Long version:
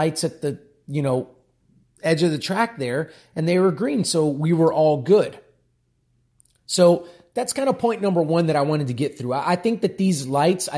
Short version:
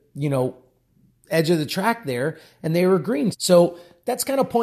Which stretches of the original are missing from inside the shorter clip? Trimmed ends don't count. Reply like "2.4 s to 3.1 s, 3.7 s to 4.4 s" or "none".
4.0 s to 6.6 s